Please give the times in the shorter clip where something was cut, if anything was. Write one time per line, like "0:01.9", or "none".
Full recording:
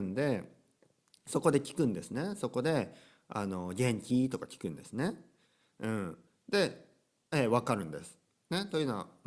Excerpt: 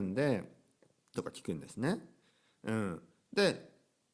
0:01.1